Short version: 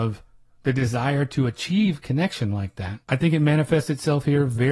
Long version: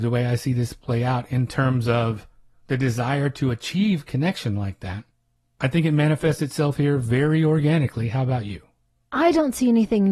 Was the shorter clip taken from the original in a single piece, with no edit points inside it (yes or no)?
no